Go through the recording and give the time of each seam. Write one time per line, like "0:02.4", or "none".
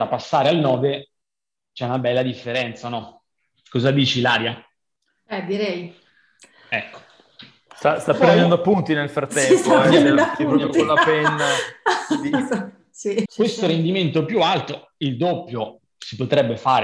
0:13.3